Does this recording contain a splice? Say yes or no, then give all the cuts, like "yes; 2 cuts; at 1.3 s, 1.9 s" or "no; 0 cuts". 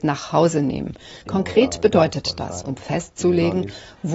yes; 2 cuts; at 1.2 s, 2.6 s